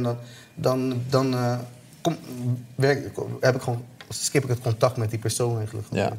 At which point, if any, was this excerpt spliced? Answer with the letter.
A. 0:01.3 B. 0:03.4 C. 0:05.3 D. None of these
D